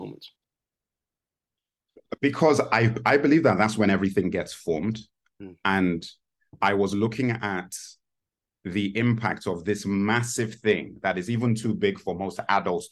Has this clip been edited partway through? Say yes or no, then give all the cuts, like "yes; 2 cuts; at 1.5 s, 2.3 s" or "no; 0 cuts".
no; 0 cuts